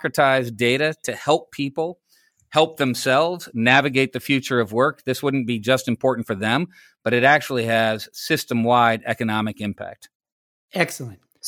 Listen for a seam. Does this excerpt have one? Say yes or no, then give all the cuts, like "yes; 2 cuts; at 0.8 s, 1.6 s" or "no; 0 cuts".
no; 0 cuts